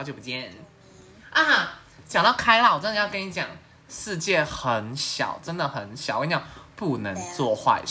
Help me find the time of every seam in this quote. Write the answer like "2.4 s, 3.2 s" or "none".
none